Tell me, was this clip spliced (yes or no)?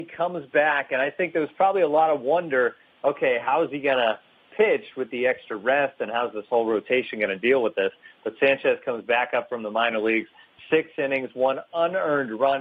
no